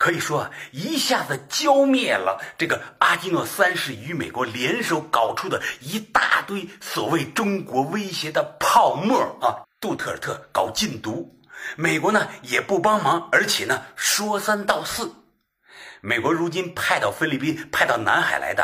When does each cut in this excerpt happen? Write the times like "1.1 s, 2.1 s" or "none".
9.6 s